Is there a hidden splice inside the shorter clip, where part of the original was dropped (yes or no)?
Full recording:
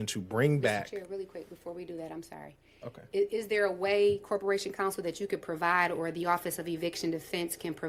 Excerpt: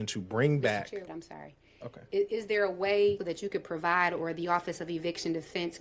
yes